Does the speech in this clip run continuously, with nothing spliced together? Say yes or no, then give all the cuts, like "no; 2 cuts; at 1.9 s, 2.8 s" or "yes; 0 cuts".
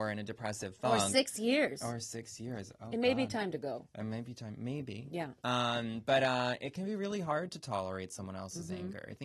yes; 0 cuts